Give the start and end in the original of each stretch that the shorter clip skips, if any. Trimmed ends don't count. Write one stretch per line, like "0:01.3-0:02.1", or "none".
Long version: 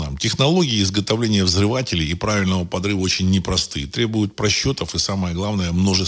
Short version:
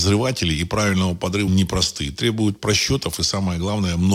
0:03.0-0:03.2